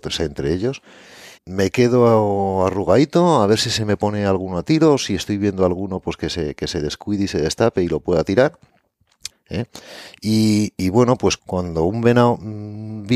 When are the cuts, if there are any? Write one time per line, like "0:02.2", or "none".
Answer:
0:01.4
0:09.3
0:11.4